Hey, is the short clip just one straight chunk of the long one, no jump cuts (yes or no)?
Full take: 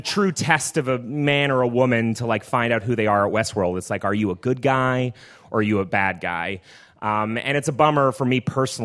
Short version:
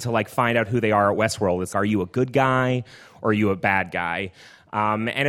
no